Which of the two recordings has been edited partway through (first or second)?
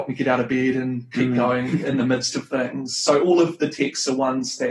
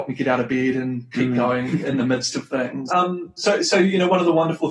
second